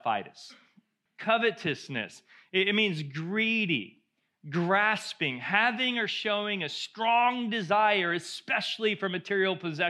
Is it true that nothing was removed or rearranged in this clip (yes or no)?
no